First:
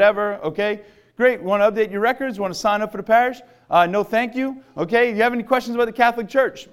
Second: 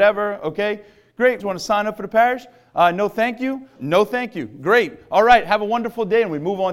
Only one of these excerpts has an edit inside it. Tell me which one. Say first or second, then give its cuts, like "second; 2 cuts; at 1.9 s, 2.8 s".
second; 2 cuts; at 1.4 s, 3.8 s